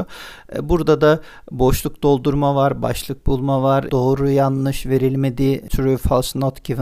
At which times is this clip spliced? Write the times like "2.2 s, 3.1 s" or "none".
3.9 s